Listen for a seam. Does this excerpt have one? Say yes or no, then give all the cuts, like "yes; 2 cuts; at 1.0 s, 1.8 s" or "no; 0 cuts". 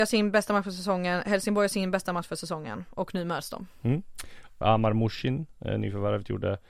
yes; 1 cut; at 4.6 s